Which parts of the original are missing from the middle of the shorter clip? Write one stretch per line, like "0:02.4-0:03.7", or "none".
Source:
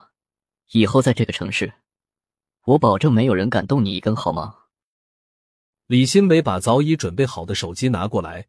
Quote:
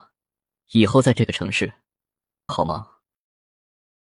0:02.5-0:04.2